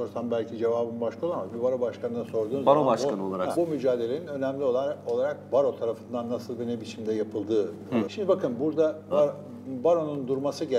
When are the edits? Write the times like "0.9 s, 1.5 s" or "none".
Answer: 3.5 s, 8.0 s, 9.1 s